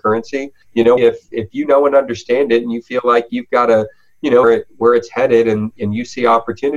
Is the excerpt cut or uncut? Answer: cut